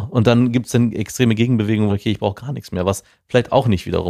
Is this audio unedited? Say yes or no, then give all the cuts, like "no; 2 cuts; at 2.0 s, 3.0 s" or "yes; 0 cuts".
no; 1 cut; at 1.9 s